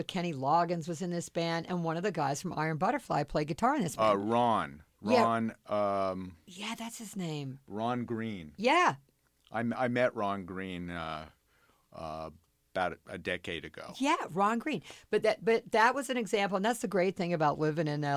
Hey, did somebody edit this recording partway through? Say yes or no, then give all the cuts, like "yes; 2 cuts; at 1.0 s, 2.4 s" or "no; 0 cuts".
no; 0 cuts